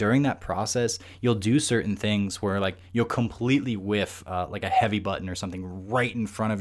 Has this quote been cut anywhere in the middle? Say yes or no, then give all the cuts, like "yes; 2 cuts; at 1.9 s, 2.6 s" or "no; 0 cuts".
no; 0 cuts